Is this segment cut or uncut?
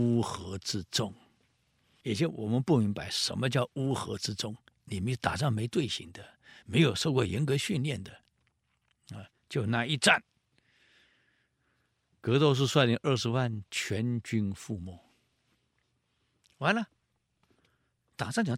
uncut